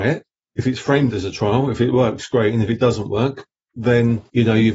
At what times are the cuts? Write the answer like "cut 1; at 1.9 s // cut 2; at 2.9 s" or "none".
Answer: none